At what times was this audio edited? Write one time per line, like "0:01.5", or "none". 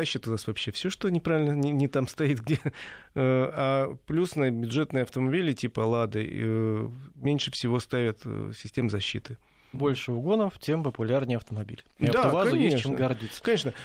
0:09.7